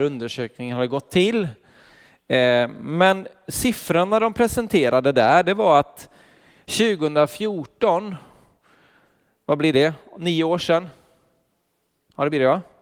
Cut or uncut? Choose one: uncut